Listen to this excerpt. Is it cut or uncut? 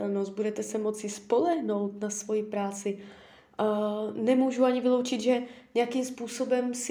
uncut